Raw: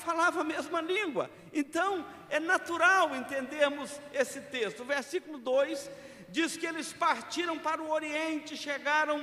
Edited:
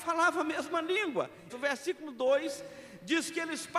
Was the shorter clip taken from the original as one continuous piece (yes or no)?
no